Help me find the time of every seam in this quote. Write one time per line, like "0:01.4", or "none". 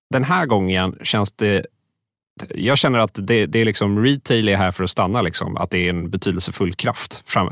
none